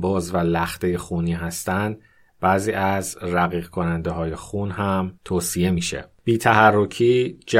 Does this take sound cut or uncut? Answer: cut